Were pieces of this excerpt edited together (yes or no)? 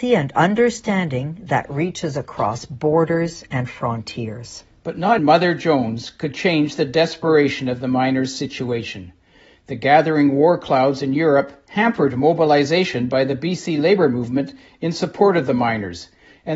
yes